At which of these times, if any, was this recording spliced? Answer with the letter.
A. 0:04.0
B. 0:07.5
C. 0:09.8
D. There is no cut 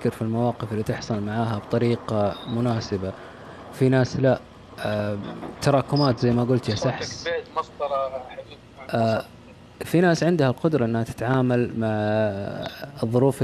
C